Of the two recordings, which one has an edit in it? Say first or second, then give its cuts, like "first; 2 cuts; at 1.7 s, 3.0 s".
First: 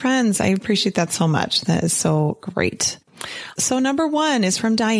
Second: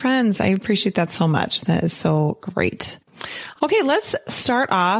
first; 1 cut; at 3.6 s